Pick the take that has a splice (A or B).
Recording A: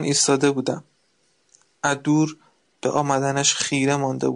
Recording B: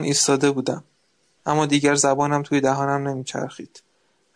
B